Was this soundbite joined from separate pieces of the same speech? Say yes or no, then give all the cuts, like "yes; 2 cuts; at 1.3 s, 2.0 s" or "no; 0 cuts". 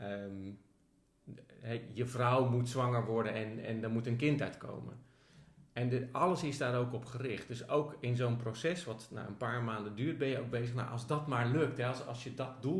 no; 0 cuts